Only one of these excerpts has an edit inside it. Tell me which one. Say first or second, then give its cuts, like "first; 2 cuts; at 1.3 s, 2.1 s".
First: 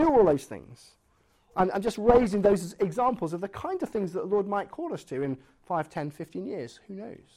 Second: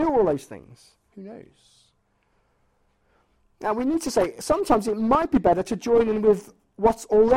second; 1 cut; at 1.1 s